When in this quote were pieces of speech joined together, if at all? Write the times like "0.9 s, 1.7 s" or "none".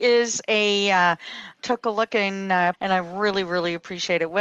1.5 s, 2.7 s